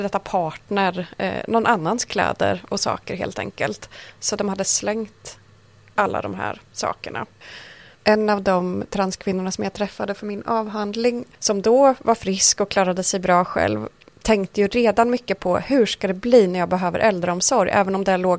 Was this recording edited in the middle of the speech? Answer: no; 0 cuts

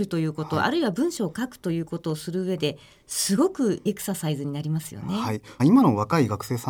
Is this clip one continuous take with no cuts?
no; 2 cuts; at 3.9 s, 5.6 s

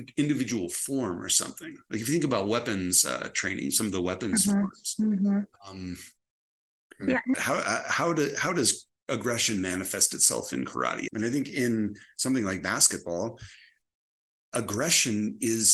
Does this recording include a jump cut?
yes; 2 cuts; at 7.3 s, 11.1 s

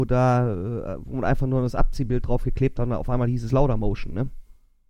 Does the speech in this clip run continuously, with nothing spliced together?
yes; 0 cuts

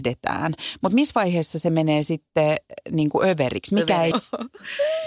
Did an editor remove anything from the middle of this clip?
yes; 1 cut; at 4.1 s

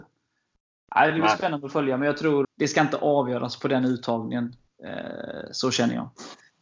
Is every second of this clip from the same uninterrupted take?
no; 1 cut; at 2.4 s

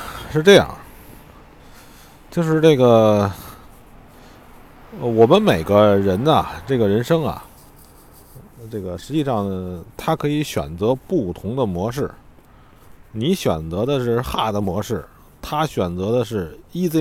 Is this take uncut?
yes; 0 cuts

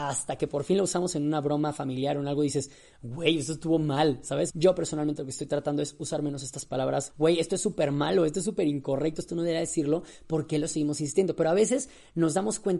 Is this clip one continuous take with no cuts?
no; 2 cuts; at 4.5 s, 7.1 s

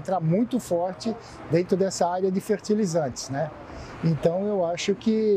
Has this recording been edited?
no; 0 cuts

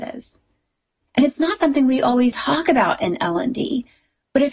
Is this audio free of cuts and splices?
no; 2 cuts; at 1.0 s, 2.3 s

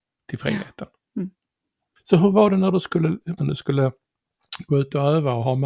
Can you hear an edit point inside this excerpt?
yes; 2 cuts; at 2.0 s, 3.4 s

